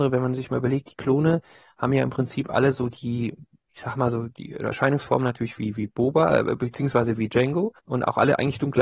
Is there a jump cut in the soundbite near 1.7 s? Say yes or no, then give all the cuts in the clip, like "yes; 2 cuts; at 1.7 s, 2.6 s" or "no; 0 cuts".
no; 1 cut; at 7.8 s